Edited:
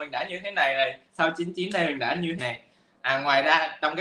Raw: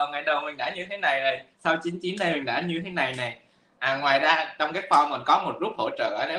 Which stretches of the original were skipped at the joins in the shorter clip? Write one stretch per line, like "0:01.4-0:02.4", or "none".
0:02.8-0:03.2